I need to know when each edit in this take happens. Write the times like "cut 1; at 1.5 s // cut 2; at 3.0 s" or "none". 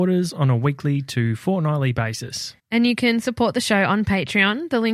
cut 1; at 2.6 s

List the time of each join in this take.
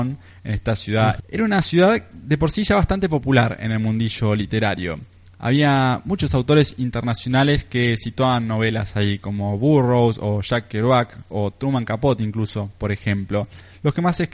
cut 1; at 1.2 s

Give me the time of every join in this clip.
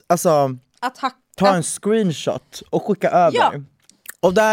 none

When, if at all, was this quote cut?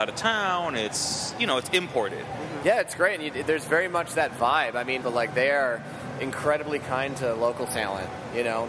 cut 1; at 2.6 s // cut 2; at 5.0 s

